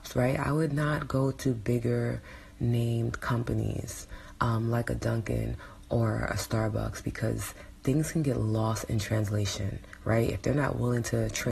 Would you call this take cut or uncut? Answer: uncut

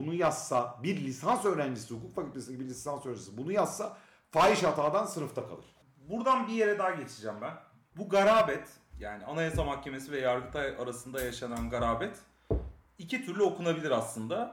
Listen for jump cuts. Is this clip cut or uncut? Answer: uncut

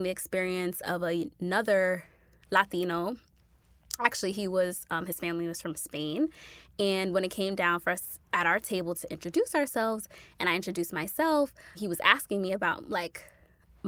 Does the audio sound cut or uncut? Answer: uncut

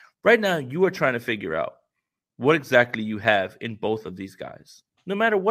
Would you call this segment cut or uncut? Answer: uncut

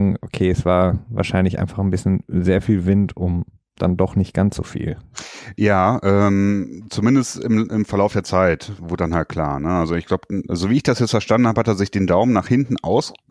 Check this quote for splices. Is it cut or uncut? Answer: uncut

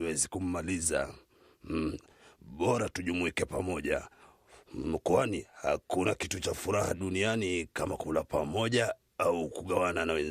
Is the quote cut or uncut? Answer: uncut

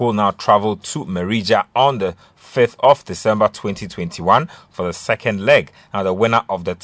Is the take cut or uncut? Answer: uncut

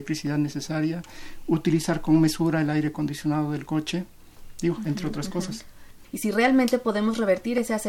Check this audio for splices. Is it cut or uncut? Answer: cut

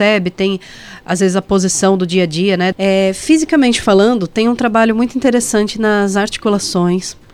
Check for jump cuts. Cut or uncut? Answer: cut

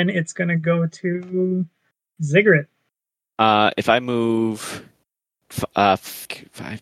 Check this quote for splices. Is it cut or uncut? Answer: uncut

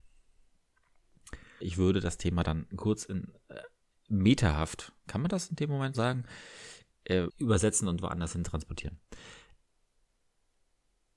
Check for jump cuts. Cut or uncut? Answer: cut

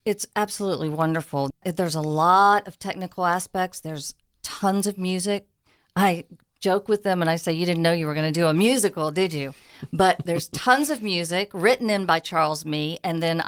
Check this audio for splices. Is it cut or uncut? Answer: uncut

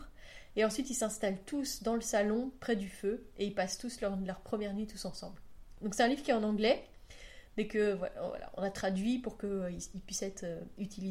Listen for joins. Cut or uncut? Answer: cut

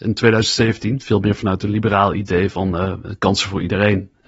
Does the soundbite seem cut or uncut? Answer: uncut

